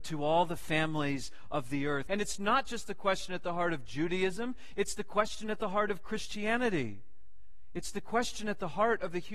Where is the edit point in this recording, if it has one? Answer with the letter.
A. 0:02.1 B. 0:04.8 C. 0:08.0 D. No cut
A